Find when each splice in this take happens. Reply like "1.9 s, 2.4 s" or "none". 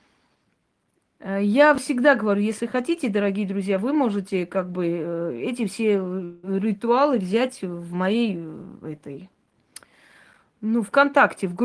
1.1 s